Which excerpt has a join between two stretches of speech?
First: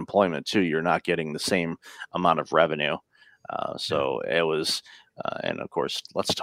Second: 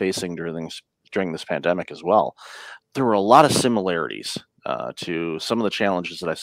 second; 1 cut; at 2.8 s

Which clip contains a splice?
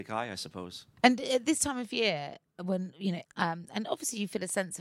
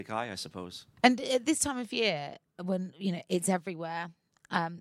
first; 1 cut; at 3.2 s

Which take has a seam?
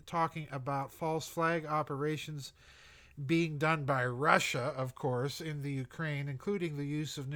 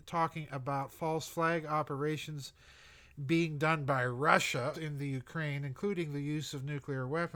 second; 1 cut; at 4.7 s

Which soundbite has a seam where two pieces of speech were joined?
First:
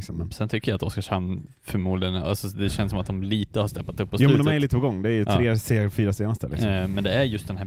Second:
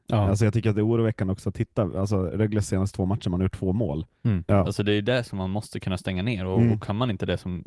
second; 1 cut; at 4.5 s

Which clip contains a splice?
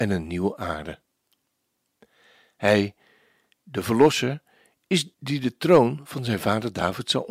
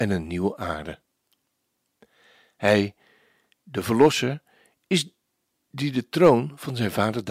first; 1 cut; at 5.1 s

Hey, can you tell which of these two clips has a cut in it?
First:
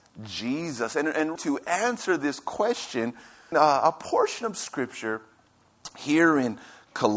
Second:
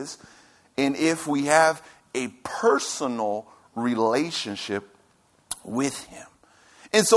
first; 2 cuts; at 1.4 s, 3.5 s

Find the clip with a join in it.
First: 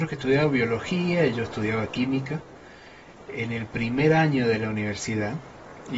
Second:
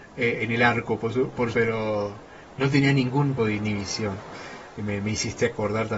second; 2 cuts; at 1.5 s, 3.4 s

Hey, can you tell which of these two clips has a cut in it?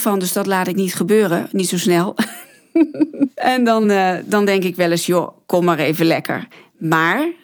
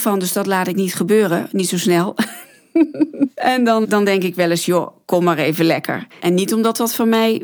second; 2 cuts; at 3.8 s, 6.2 s

